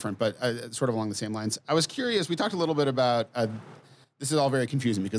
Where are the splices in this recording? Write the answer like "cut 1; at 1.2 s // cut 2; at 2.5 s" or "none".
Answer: none

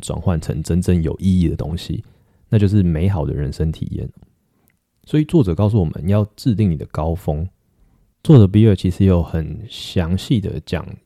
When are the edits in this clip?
cut 1; at 8.1 s

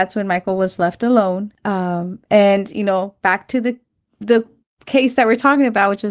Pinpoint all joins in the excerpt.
none

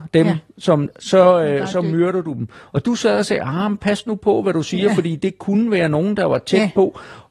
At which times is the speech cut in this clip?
none

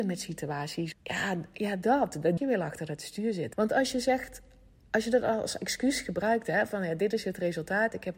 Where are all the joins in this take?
cut 1; at 0.9 s // cut 2; at 2.4 s // cut 3; at 3.5 s

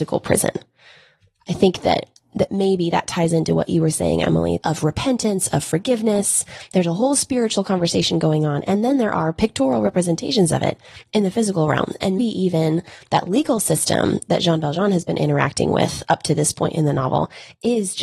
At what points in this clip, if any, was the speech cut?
cut 1; at 4.6 s // cut 2; at 12.2 s

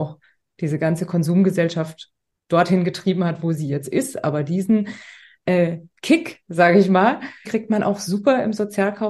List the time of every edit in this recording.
cut 1; at 7.4 s

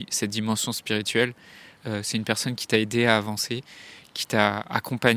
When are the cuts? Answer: cut 1; at 1.8 s

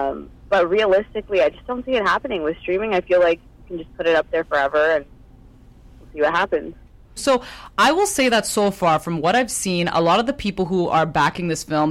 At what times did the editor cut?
cut 1; at 7.2 s

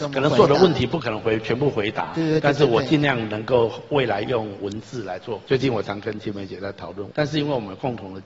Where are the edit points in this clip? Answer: cut 1; at 5.4 s // cut 2; at 7.1 s

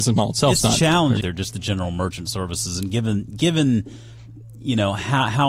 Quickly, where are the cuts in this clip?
cut 1; at 1.2 s

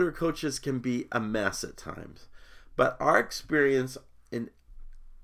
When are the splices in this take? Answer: none

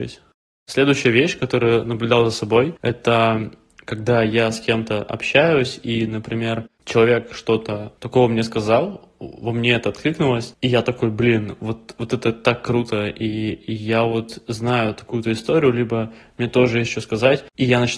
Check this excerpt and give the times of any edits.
cut 1; at 8.0 s

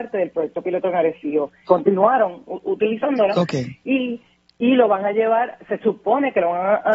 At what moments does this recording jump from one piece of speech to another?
cut 1; at 1.7 s

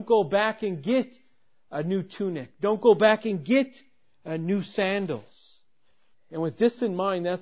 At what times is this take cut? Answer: cut 1; at 6.1 s

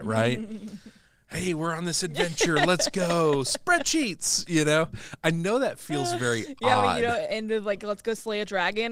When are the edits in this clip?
none

